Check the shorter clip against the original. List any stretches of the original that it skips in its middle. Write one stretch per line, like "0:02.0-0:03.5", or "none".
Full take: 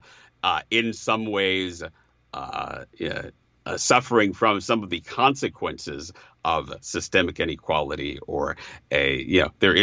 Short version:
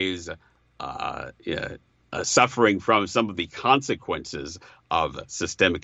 none